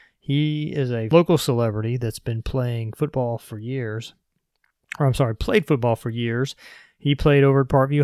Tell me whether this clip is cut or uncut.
uncut